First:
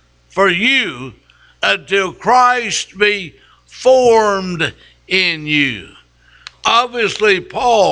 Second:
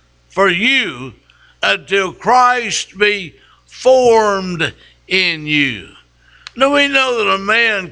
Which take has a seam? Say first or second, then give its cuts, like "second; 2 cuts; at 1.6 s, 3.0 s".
first; 1 cut; at 6.5 s